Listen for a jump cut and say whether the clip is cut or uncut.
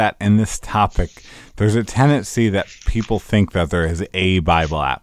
uncut